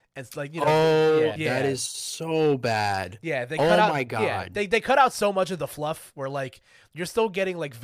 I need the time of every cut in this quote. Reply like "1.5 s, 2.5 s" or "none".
1.4 s